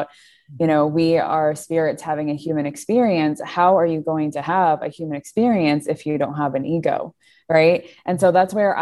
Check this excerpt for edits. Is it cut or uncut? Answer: uncut